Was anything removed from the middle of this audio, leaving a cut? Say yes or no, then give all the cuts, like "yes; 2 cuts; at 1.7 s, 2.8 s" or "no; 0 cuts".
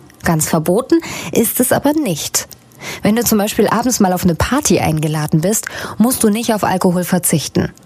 no; 0 cuts